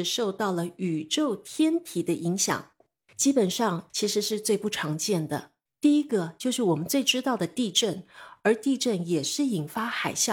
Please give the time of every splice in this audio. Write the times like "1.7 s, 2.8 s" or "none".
3.9 s, 5.7 s